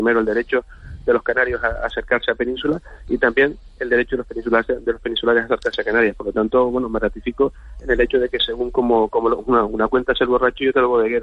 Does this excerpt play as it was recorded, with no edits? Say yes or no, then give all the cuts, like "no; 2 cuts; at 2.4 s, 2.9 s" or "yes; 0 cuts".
yes; 0 cuts